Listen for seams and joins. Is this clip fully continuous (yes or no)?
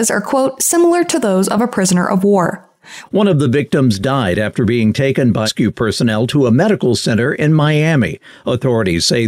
no